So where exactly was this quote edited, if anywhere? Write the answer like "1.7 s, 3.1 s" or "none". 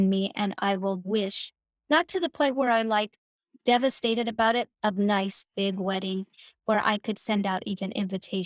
4.7 s